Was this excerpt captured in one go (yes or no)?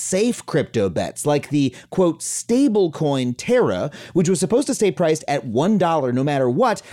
yes